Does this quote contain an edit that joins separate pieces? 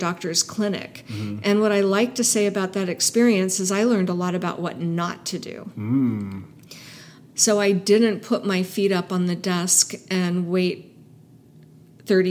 no; 0 cuts

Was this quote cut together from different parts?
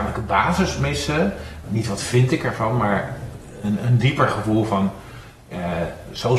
yes; 1 cut; at 1.6 s

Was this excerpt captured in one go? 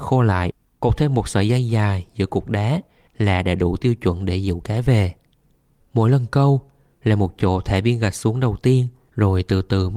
yes; 0 cuts

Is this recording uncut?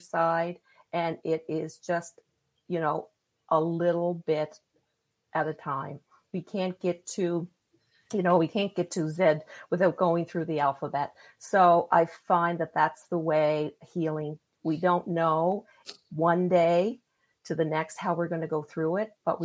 yes; 0 cuts

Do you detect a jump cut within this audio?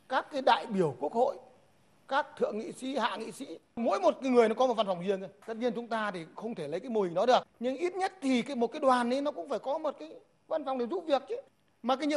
no; 0 cuts

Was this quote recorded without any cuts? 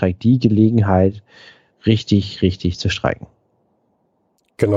yes; 0 cuts

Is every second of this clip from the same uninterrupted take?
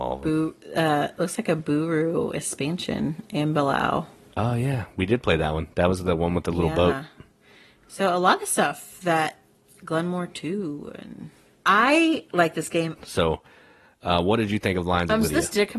no; 1 cut; at 13.0 s

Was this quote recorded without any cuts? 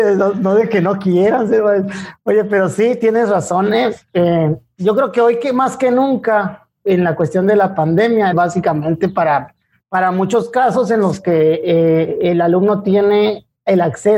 no; 1 cut; at 8.3 s

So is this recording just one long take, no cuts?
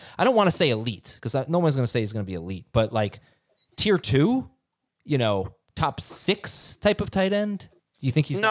yes; 0 cuts

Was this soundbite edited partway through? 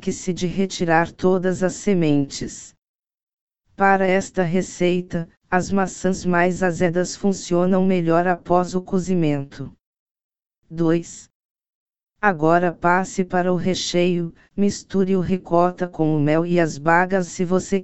no; 0 cuts

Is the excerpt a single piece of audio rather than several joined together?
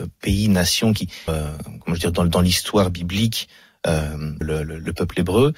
no; 2 cuts; at 1.3 s, 4.4 s

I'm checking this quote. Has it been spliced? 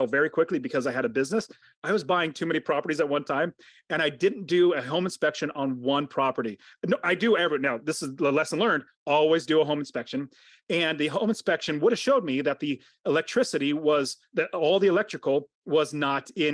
no; 0 cuts

